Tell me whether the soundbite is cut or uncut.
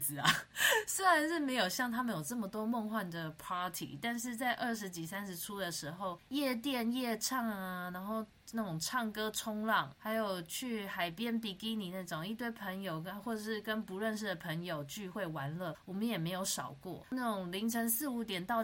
uncut